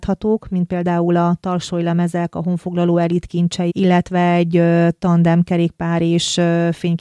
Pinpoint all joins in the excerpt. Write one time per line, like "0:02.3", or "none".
0:03.7